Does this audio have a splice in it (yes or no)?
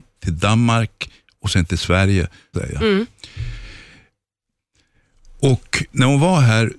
yes